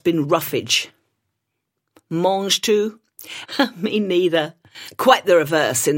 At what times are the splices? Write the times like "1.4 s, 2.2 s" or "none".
3.5 s